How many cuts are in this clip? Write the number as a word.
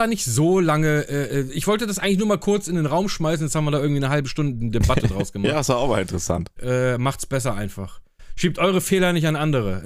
one